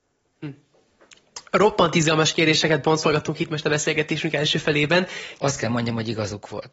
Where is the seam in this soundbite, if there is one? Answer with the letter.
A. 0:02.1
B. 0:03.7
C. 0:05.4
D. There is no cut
C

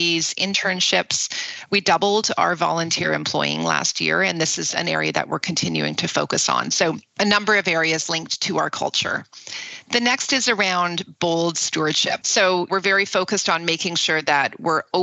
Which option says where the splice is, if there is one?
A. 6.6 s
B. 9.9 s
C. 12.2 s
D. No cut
C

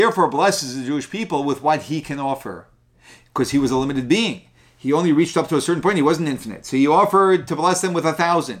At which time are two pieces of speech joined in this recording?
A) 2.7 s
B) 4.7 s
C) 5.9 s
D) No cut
D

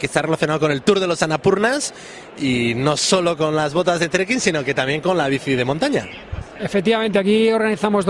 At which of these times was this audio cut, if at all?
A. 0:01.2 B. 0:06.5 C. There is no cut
C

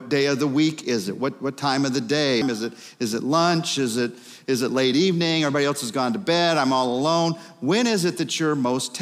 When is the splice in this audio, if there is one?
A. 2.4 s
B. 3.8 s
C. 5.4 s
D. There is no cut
A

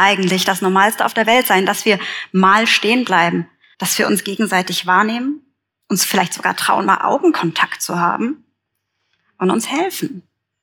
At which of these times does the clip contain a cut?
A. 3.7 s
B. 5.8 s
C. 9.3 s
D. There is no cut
A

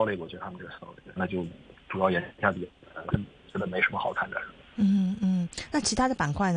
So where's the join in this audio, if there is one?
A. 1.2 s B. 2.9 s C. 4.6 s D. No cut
A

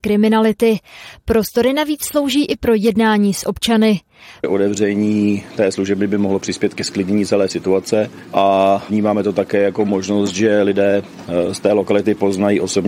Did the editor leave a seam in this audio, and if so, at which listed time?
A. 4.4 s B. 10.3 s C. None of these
A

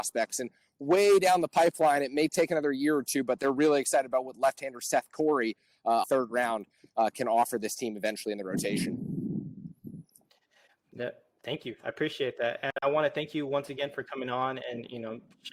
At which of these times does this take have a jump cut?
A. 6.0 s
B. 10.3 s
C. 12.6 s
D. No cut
A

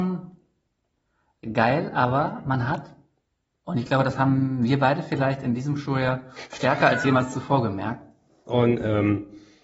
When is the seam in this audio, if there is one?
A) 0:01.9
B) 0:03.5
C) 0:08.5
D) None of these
C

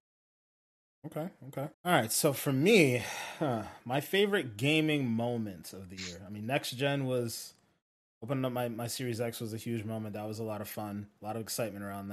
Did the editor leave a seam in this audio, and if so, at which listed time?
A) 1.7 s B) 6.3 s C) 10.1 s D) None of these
A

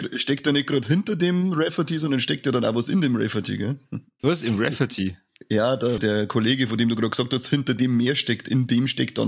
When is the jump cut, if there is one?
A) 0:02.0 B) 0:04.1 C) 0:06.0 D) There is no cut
C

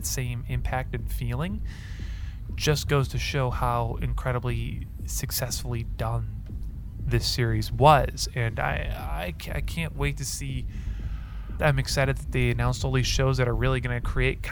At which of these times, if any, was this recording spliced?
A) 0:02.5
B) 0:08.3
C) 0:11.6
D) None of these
C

